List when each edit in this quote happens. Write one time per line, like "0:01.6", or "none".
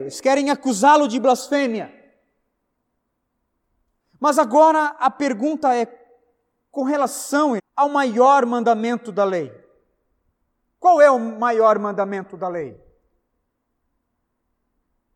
0:07.6

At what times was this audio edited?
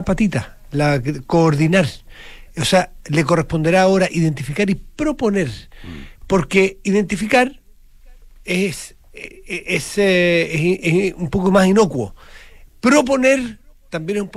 none

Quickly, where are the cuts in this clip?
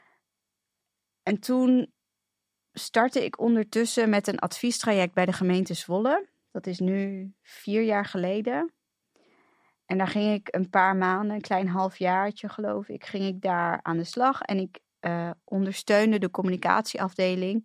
none

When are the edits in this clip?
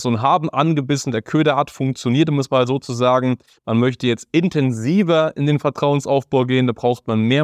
none

